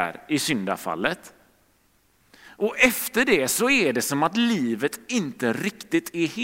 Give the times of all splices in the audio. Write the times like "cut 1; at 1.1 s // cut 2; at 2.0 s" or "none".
none

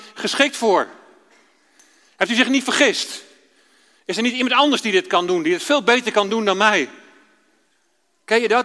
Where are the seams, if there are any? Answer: none

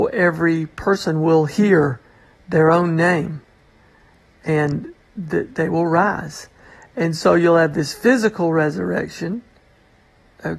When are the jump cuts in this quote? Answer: none

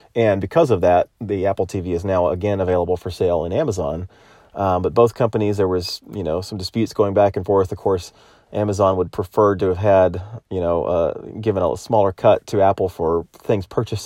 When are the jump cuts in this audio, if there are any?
none

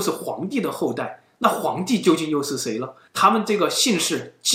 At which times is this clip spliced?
cut 1; at 3.1 s

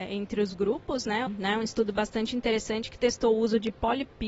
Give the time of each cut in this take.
cut 1; at 1.3 s

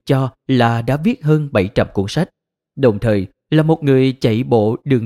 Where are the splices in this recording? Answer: none

